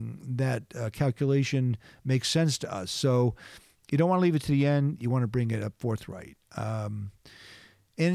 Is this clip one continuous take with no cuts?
yes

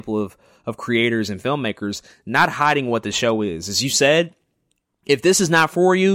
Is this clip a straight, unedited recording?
yes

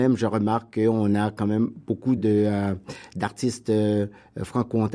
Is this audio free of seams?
no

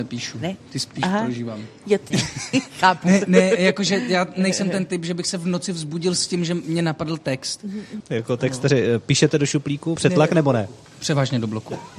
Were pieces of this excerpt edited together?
yes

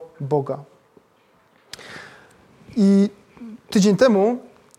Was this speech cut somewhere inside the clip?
no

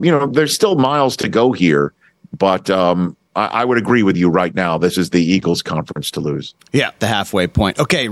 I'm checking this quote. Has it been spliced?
yes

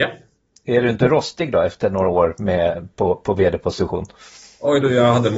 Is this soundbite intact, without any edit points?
yes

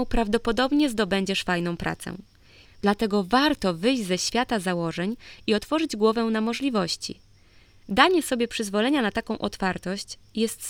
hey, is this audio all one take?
no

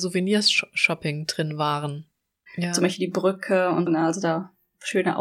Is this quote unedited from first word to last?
no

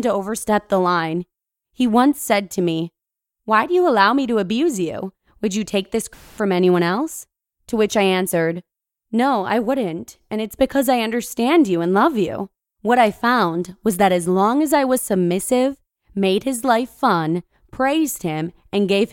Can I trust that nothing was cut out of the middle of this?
no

